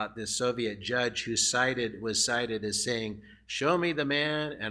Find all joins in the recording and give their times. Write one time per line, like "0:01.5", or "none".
none